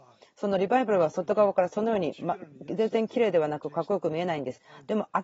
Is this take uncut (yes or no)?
yes